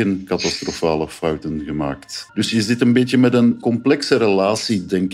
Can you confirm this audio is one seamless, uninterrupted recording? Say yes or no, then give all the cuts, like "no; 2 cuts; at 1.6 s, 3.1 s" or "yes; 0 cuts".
no; 1 cut; at 2.3 s